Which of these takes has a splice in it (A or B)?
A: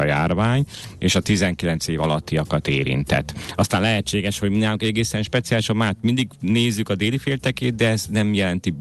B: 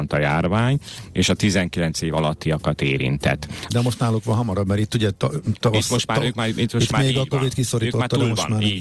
B